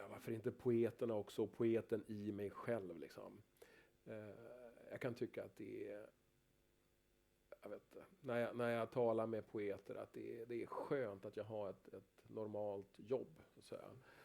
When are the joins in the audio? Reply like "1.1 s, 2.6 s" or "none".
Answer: none